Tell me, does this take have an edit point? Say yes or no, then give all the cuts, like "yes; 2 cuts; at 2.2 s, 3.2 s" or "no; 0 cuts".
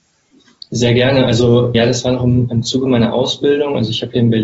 yes; 1 cut; at 1.7 s